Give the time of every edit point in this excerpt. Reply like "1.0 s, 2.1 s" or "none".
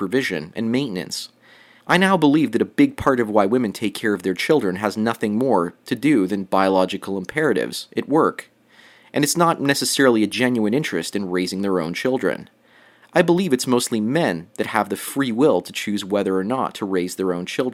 1.8 s